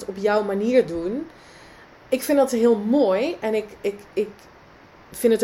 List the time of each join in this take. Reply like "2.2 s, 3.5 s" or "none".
none